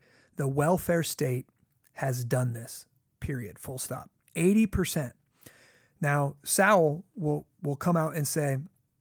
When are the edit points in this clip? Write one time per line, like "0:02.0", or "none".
0:04.2